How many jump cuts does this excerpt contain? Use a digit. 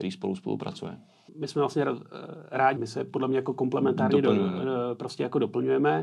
2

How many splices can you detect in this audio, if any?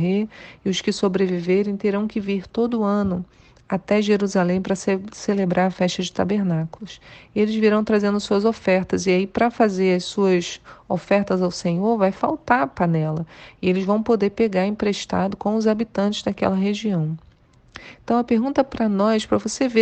0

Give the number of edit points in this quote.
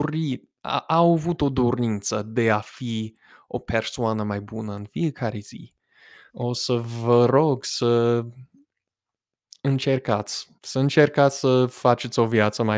2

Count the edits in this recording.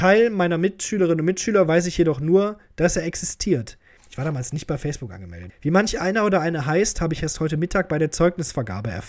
2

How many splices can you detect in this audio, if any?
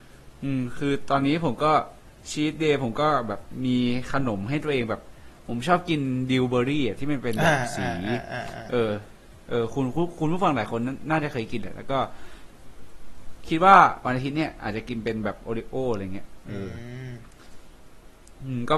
0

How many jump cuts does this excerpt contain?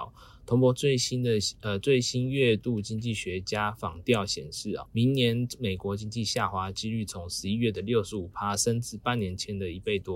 1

